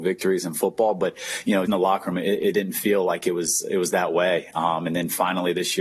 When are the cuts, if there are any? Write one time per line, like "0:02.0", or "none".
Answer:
0:01.7